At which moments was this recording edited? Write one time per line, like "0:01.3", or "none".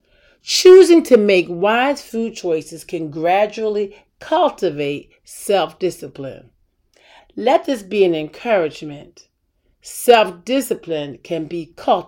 0:07.2